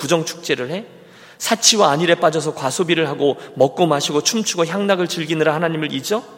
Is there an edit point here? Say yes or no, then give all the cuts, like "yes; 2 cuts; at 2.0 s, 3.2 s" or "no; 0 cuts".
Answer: no; 0 cuts